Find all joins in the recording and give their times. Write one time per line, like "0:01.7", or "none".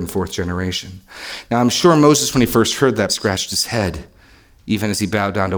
0:03.1